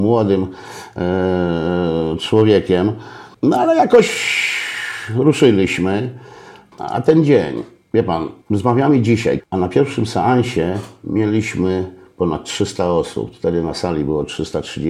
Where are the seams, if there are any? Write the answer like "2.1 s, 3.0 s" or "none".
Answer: 6.7 s, 9.4 s

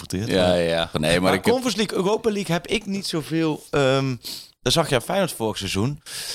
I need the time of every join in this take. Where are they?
0.9 s

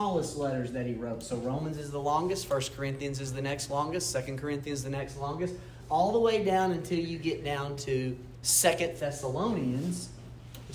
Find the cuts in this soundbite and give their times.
none

